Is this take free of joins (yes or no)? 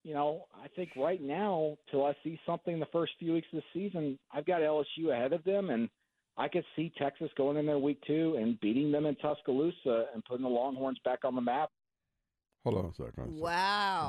yes